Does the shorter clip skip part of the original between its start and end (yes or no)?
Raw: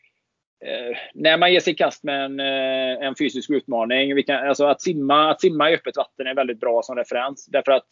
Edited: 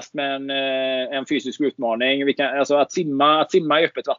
no